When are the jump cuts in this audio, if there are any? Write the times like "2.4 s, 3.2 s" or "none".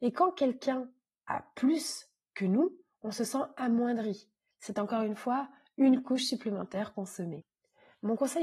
4.5 s